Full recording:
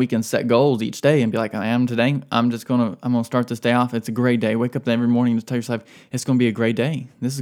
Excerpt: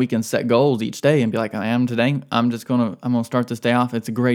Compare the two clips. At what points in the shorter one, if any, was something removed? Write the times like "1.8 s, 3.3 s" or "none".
none